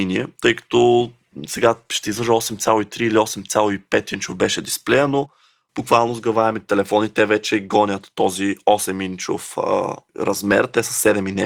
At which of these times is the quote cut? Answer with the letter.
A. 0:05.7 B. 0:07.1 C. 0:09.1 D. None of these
D